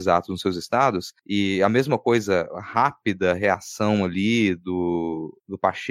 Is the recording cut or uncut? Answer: uncut